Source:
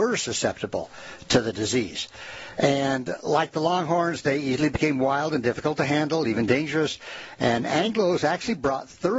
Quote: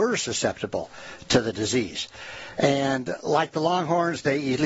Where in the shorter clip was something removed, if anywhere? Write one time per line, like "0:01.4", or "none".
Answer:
none